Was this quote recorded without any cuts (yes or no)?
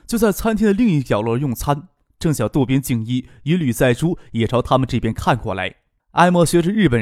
no